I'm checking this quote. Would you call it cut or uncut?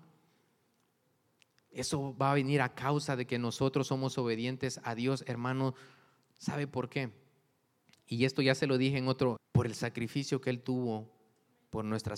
cut